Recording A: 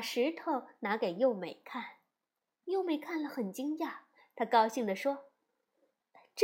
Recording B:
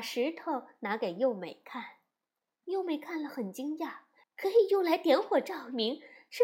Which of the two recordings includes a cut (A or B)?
B